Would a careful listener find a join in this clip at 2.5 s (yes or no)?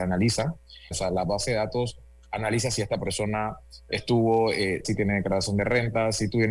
no